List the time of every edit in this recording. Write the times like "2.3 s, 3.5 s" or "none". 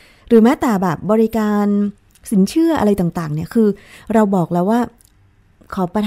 none